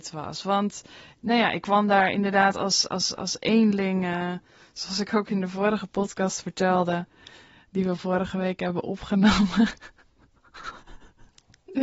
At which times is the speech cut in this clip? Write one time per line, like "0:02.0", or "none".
none